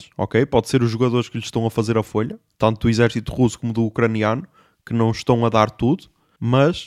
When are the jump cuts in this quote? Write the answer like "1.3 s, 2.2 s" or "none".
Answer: none